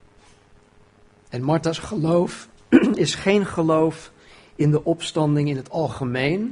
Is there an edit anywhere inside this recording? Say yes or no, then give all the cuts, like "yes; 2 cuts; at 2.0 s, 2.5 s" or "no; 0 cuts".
no; 0 cuts